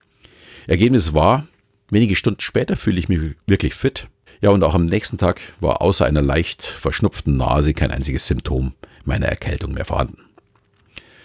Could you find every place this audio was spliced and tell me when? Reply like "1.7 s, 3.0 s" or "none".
4.3 s